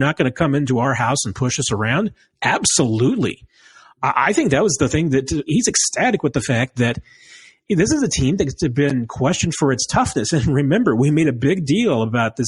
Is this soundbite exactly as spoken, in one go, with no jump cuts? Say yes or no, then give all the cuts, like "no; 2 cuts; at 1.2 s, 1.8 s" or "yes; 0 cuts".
no; 1 cut; at 5.5 s